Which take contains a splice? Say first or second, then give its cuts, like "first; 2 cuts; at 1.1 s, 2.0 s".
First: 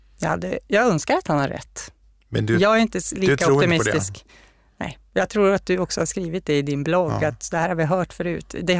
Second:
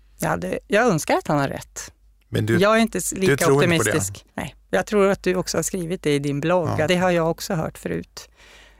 second; 2 cuts; at 4.3 s, 6.9 s